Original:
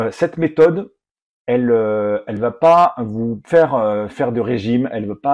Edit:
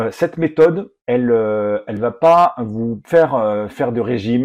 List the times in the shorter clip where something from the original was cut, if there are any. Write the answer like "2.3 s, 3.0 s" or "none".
1.0 s

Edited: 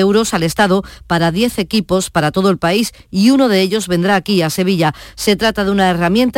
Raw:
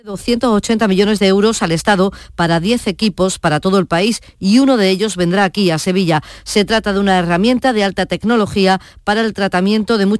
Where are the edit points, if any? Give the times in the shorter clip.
none

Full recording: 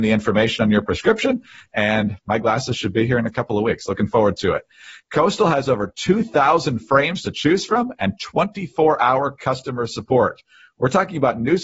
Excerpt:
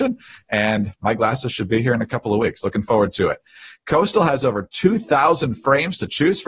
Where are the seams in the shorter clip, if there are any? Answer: none

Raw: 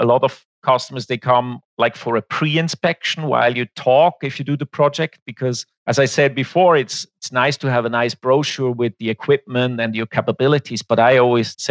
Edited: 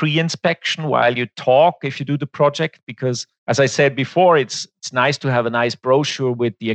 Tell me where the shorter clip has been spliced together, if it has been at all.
none

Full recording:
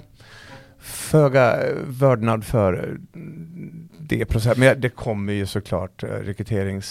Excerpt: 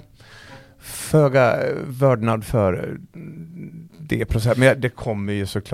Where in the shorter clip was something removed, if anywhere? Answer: none

